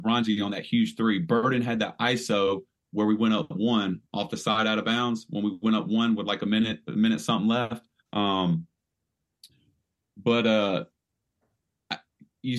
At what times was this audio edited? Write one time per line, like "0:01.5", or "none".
0:08.0